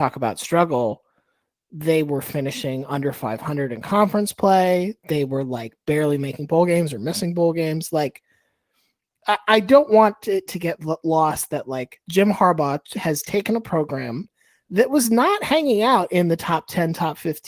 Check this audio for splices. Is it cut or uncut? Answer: uncut